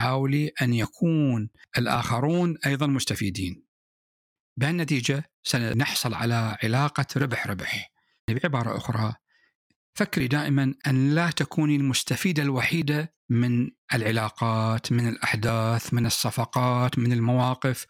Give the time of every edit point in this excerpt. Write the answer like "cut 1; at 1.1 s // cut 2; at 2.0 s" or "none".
cut 1; at 8.2 s